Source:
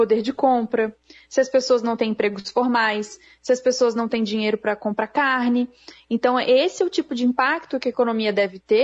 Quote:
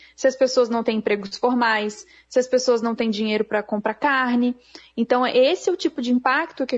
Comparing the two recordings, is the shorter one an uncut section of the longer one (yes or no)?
yes